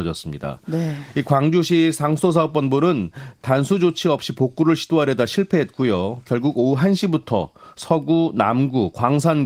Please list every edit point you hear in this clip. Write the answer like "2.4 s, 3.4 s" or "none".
none